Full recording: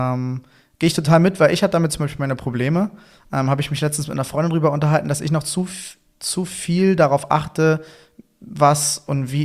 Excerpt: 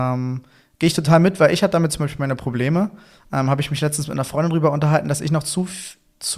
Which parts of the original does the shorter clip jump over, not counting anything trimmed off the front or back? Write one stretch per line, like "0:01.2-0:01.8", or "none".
none

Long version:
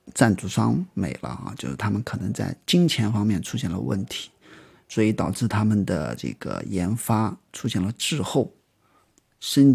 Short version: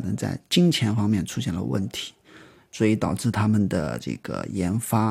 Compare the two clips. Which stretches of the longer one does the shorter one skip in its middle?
none

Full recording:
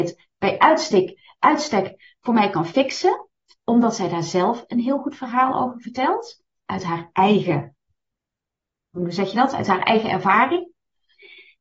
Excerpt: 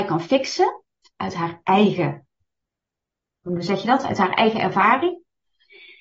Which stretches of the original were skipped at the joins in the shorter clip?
0:03.6-0:06.6

